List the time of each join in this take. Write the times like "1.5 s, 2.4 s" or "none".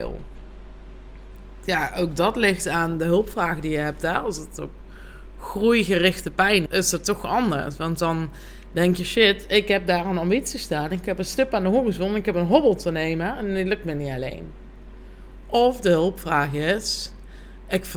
6.7 s